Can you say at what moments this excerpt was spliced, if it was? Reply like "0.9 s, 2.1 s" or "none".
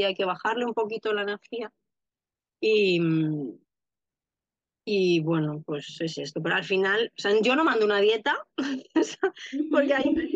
none